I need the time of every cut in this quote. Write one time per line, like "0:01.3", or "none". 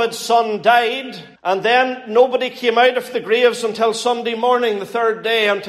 0:01.4